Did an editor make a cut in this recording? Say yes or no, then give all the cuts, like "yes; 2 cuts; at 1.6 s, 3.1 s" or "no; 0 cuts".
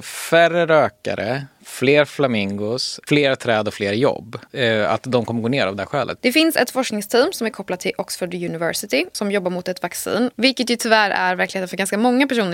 yes; 3 cuts; at 4.5 s, 6.2 s, 10.3 s